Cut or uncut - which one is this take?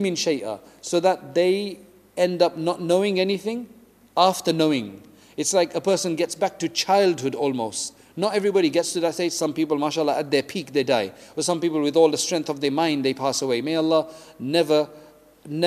uncut